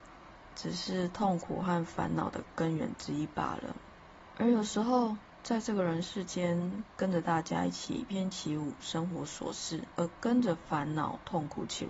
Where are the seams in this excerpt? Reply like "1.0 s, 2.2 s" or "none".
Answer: 8.1 s, 9.9 s